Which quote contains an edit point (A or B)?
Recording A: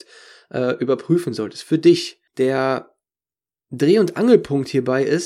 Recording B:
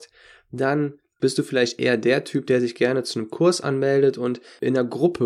A